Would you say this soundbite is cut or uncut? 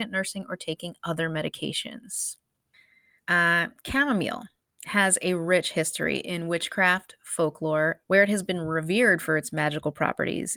cut